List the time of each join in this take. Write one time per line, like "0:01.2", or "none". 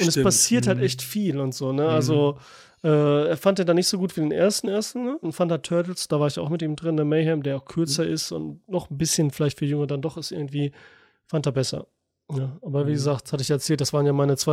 0:05.2